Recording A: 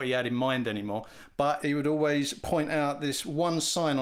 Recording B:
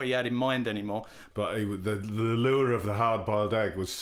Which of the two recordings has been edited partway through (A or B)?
B